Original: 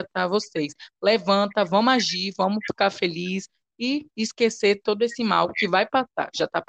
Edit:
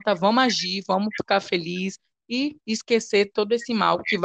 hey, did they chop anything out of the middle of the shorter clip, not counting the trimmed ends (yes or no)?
no